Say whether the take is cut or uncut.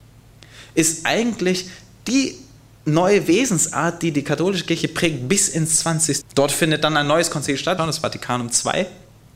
cut